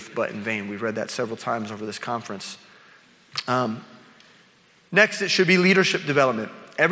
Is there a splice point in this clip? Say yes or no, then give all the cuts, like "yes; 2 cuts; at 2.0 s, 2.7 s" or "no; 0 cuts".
no; 0 cuts